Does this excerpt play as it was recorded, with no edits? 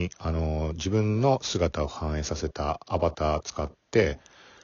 yes; 0 cuts

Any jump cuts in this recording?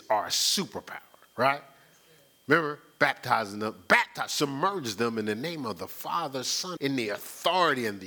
yes; 1 cut; at 6.8 s

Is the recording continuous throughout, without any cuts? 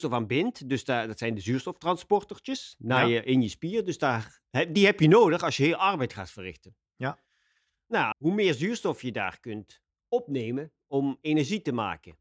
no; 1 cut; at 8.1 s

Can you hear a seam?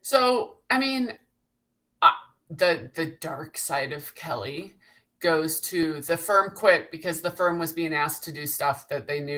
no; 0 cuts

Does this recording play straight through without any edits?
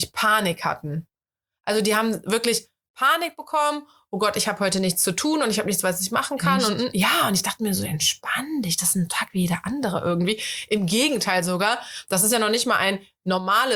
yes; 0 cuts

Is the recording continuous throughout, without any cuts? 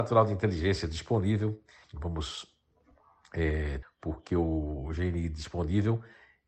no; 2 cuts; at 1.8 s, 3.8 s

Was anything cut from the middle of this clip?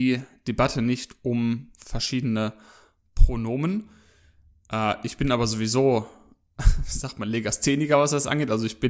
no; 0 cuts

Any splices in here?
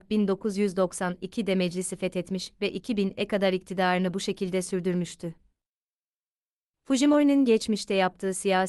no; 0 cuts

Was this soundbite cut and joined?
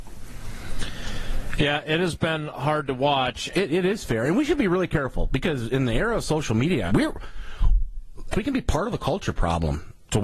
yes; 3 cuts; at 3.5 s, 6.9 s, 8.3 s

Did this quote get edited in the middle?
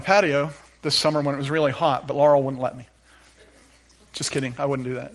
no; 0 cuts

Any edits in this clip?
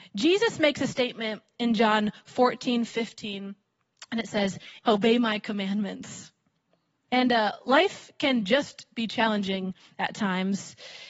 yes; 2 cuts; at 4.8 s, 7.1 s

